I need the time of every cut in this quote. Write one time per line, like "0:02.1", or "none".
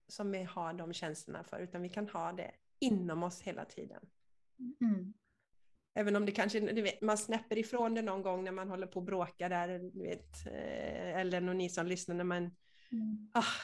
0:07.0